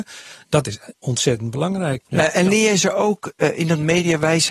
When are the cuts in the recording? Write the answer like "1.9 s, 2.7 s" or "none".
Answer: 2.0 s